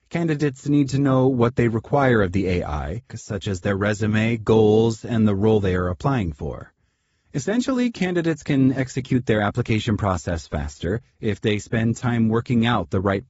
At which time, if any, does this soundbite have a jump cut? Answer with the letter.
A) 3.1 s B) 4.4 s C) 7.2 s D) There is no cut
A